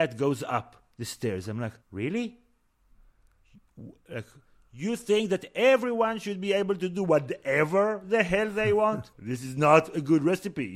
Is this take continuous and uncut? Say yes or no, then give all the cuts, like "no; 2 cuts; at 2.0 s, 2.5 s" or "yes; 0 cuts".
no; 2 cuts; at 1.8 s, 9.1 s